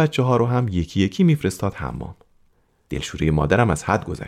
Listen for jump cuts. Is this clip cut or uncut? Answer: cut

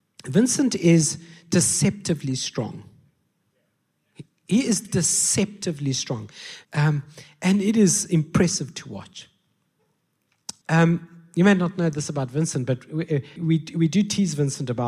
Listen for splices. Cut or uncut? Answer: cut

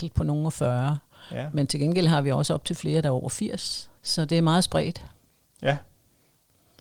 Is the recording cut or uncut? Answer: cut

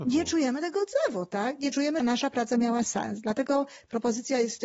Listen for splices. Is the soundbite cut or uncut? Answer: cut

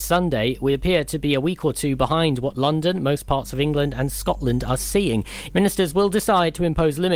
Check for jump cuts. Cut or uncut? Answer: cut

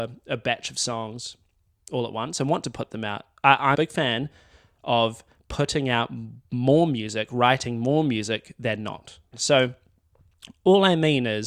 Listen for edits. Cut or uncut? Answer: cut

